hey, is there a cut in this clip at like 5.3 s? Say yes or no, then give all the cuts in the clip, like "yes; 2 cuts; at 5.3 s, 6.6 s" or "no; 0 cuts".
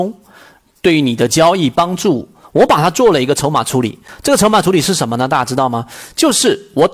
no; 1 cut; at 2.4 s